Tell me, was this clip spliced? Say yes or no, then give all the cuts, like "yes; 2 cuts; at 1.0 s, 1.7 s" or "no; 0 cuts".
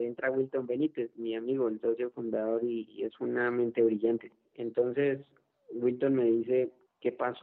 no; 0 cuts